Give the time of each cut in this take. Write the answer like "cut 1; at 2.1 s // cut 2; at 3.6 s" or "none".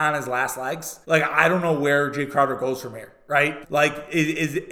cut 1; at 1.0 s // cut 2; at 3.6 s